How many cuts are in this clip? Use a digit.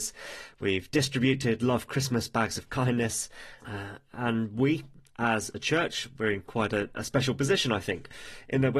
1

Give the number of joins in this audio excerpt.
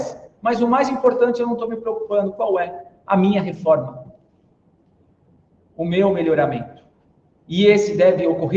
0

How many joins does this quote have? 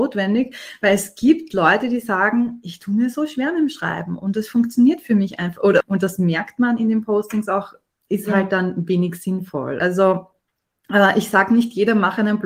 2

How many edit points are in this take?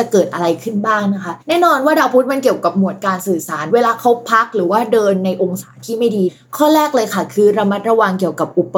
1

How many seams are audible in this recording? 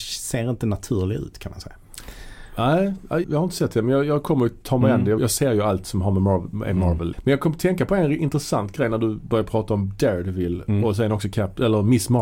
3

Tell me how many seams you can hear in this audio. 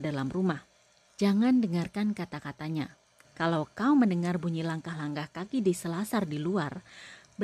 2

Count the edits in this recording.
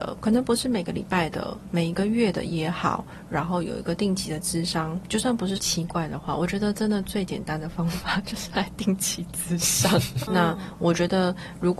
2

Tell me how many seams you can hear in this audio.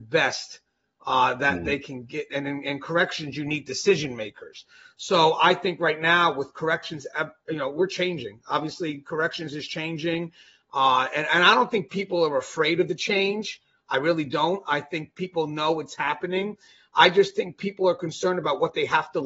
1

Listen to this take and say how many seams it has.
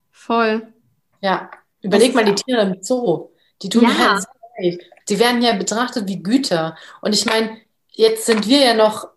2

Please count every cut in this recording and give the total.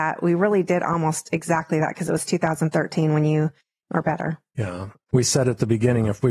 2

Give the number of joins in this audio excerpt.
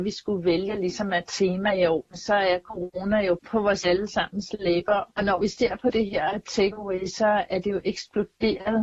0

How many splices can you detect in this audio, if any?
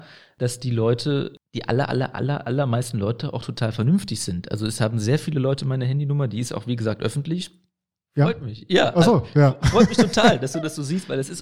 2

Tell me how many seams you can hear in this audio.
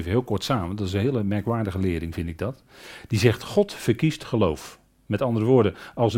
0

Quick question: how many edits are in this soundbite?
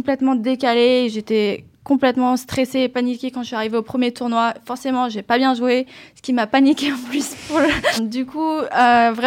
1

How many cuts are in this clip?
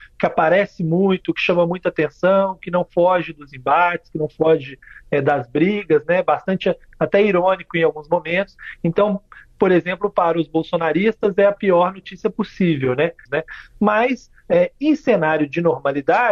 1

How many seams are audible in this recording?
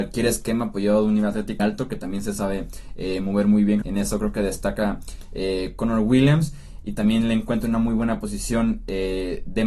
2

